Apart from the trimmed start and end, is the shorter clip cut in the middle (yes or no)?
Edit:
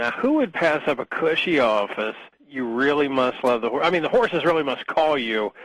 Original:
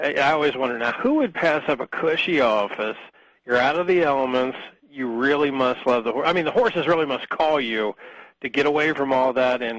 yes